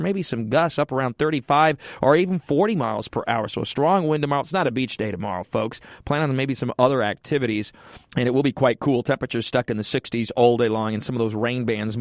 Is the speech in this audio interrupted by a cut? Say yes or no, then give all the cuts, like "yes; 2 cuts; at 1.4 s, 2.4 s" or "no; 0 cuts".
yes; 1 cut; at 8.1 s